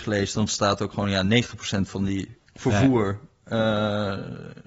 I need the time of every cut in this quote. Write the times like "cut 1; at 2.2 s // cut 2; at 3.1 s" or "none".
cut 1; at 2.4 s